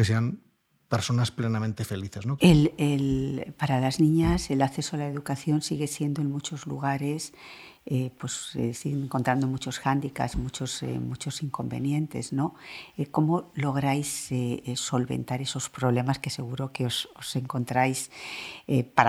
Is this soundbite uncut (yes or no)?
no